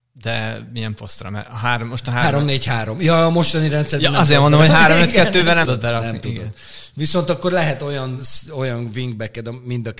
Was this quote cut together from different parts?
yes; 1 cut; at 5.7 s

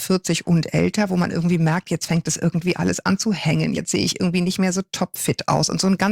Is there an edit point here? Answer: no; 0 cuts

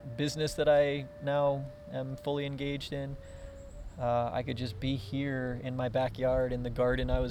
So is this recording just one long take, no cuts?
yes; 0 cuts

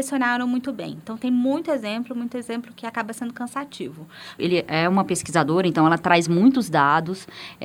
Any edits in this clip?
yes; 1 cut; at 4.4 s

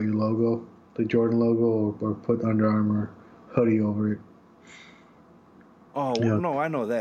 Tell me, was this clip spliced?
no; 0 cuts

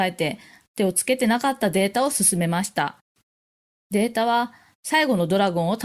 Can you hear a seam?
no; 0 cuts

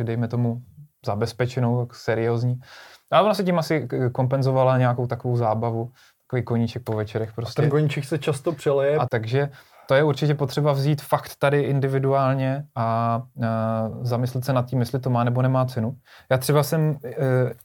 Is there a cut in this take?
yes; 1 cut; at 9.1 s

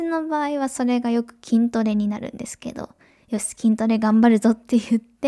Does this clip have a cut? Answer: no; 0 cuts

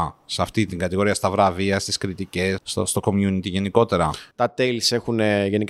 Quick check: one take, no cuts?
no; 2 cuts; at 2.6 s, 4.3 s

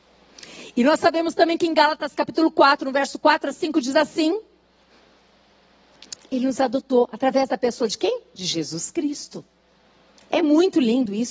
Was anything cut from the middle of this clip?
yes; 1 cut; at 6.2 s

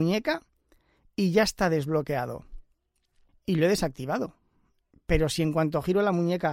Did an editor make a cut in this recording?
yes; 2 cuts; at 3.3 s, 4.9 s

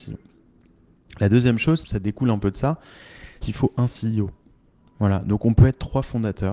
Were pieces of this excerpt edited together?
yes; 2 cuts; at 1.8 s, 3.4 s

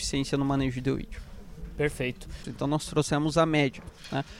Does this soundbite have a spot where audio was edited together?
yes; 1 cut; at 2.4 s

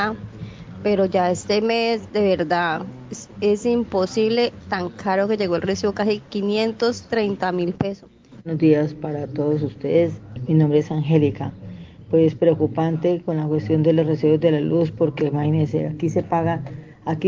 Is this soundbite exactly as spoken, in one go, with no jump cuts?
no; 1 cut; at 8.4 s

